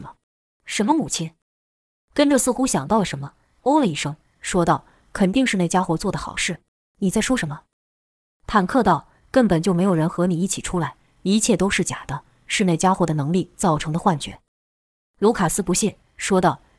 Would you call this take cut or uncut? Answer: cut